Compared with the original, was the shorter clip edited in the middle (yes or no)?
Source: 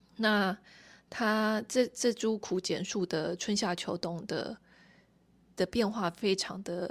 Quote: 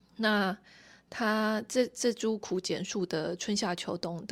no